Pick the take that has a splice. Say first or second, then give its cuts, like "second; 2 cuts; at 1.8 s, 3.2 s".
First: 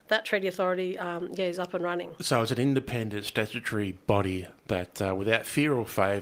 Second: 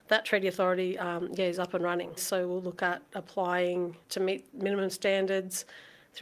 second; 2 cuts; at 2.2 s, 4.0 s